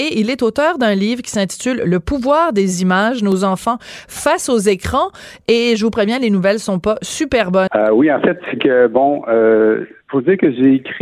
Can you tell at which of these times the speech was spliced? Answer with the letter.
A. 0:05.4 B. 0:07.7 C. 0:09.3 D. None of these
B